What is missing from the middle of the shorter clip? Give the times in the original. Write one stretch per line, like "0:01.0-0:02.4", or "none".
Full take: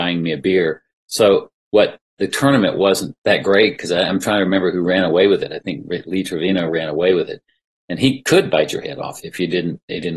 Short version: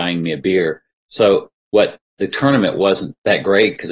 none